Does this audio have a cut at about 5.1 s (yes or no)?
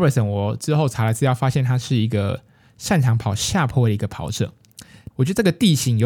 yes